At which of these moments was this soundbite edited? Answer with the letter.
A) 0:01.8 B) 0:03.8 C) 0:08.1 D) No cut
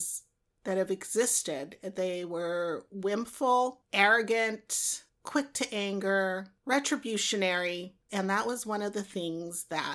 C